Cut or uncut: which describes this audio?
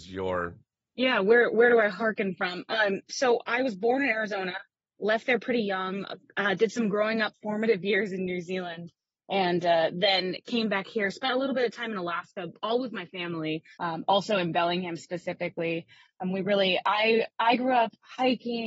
cut